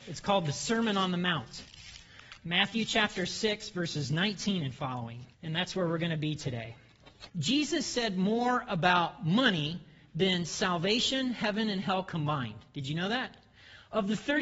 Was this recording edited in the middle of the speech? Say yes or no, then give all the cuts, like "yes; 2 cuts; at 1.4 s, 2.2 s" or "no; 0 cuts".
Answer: yes; 2 cuts; at 5.3 s, 7.3 s